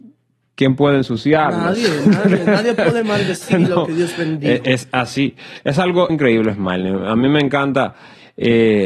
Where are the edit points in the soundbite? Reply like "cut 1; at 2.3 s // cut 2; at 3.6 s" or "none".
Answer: cut 1; at 6.1 s

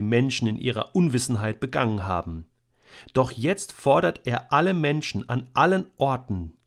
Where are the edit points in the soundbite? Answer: none

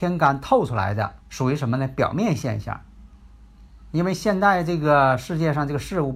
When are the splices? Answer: cut 1; at 1.2 s

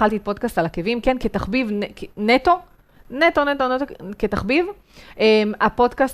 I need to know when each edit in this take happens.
none

